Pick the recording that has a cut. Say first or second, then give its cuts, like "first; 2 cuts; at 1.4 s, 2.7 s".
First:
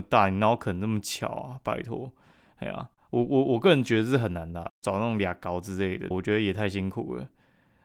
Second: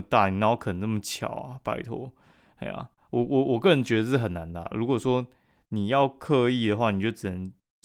first; 2 cuts; at 4.7 s, 6.1 s